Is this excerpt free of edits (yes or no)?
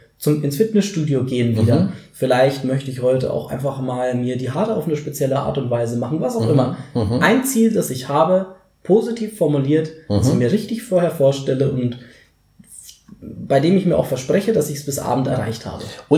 yes